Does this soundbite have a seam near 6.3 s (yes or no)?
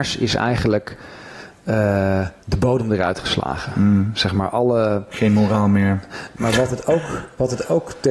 yes